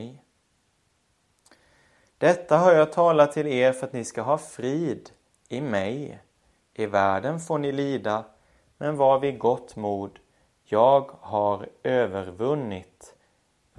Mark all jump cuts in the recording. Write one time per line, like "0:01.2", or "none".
none